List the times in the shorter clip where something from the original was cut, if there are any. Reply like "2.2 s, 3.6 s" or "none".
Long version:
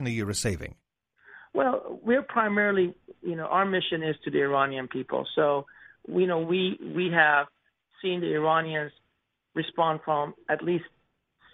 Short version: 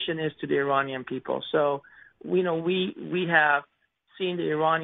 none